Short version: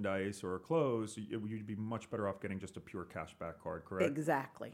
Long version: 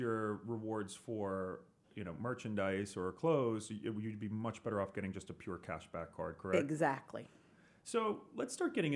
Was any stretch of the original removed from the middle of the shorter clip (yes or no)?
no